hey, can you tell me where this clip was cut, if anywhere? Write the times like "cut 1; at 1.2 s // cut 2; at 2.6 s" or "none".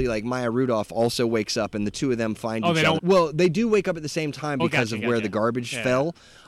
cut 1; at 3.0 s // cut 2; at 4.6 s